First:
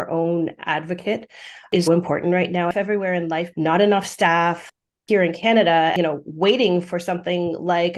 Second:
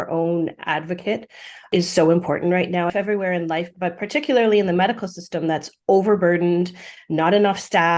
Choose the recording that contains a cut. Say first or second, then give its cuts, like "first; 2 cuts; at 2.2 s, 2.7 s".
first; 2 cuts; at 1.9 s, 3.5 s